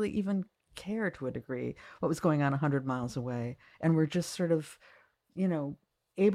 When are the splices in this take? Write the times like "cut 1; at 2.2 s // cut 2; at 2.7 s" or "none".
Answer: none